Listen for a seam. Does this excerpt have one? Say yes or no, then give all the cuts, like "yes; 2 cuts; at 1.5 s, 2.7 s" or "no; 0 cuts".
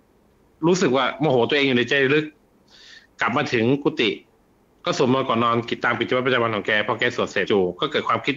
yes; 1 cut; at 7.5 s